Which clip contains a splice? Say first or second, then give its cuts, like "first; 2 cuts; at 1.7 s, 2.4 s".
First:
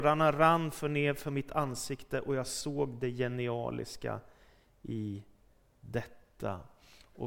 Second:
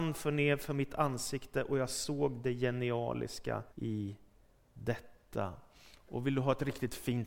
second; 1 cut; at 3.7 s